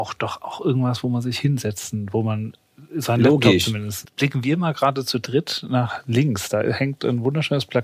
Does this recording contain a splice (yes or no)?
yes